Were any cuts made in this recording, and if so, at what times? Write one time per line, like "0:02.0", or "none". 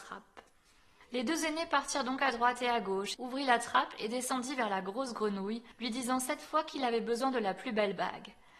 0:03.1